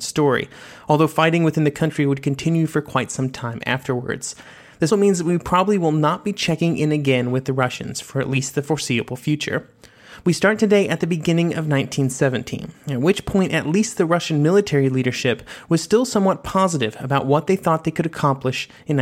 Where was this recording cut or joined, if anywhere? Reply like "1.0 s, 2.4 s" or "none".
4.9 s, 10.2 s

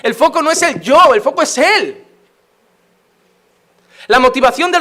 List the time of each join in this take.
none

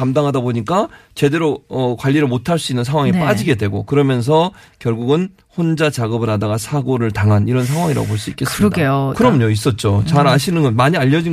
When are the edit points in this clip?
9.1 s

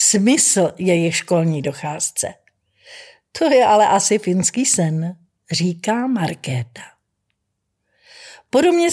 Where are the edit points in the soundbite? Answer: none

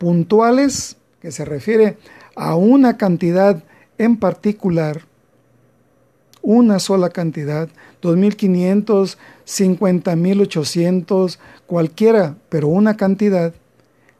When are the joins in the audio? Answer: none

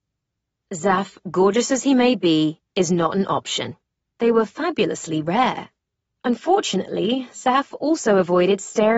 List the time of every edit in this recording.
4.1 s

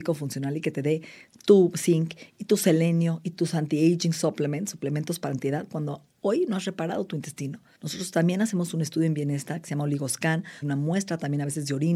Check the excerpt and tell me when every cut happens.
7.7 s, 10.6 s

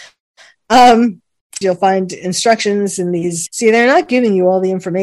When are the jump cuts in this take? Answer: 1.6 s, 3.5 s

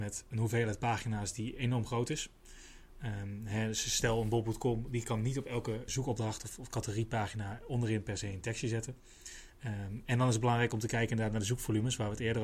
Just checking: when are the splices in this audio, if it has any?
5.9 s

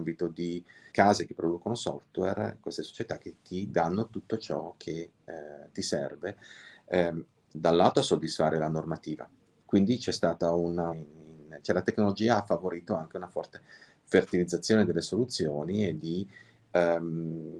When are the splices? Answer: 0.9 s, 9.6 s, 10.9 s

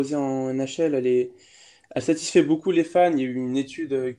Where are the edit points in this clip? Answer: none

